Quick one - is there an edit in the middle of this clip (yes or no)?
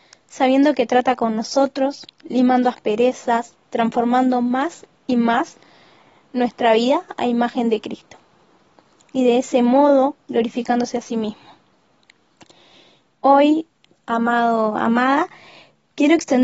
yes